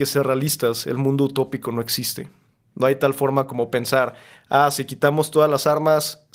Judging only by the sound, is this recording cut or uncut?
uncut